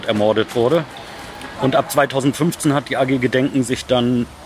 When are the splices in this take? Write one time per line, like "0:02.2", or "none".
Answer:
0:01.5